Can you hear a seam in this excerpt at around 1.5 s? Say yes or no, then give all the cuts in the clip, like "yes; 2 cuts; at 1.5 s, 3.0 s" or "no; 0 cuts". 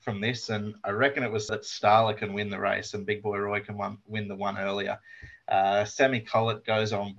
yes; 1 cut; at 1.5 s